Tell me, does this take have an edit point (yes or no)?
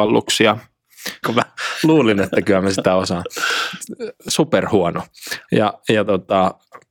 yes